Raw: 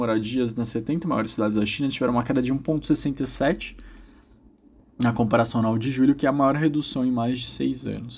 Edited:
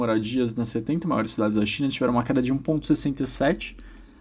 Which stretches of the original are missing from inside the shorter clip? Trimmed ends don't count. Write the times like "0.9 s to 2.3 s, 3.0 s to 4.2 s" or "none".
none